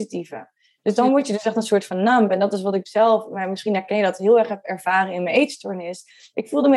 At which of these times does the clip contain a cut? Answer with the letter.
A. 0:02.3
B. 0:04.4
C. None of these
C